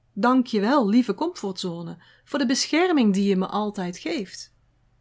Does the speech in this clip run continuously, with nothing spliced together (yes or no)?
yes